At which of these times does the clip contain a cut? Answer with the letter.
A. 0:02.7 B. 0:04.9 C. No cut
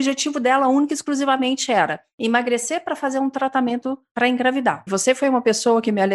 B